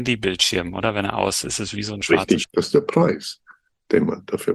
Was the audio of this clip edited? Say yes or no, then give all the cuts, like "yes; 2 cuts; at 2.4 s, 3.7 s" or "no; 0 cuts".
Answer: yes; 2 cuts; at 1.4 s, 2.4 s